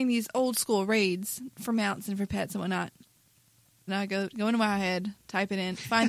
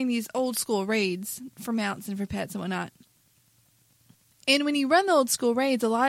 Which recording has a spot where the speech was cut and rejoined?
first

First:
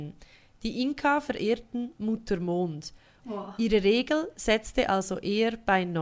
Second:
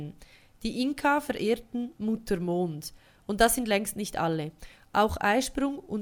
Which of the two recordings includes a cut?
first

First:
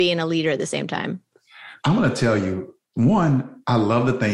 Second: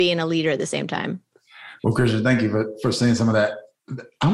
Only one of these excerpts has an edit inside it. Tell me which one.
first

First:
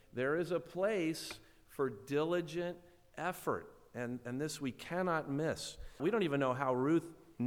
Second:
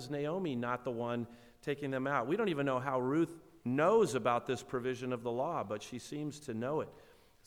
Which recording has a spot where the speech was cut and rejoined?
first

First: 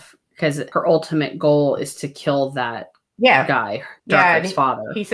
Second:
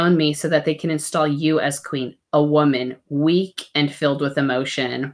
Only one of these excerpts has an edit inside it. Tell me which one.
first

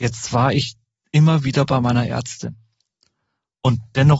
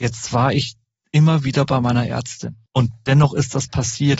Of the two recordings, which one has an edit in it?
second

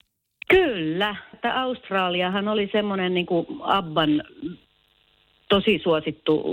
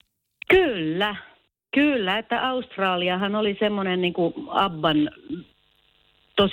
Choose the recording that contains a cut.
first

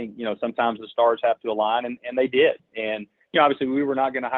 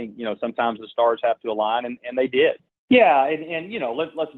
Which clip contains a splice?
second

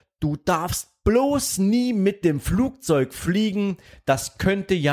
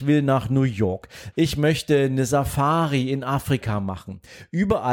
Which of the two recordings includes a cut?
second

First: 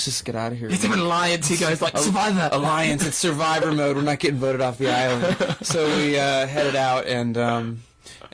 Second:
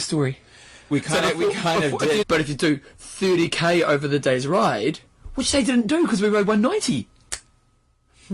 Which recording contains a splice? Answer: second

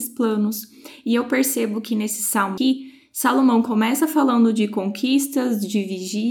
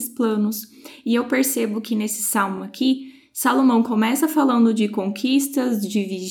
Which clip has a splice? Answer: first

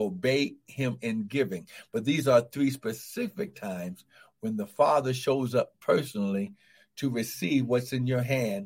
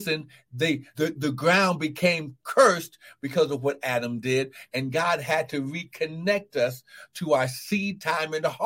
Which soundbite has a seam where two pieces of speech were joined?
second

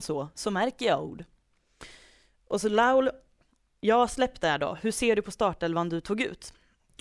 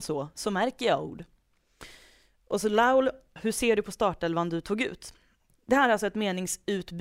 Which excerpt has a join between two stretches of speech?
second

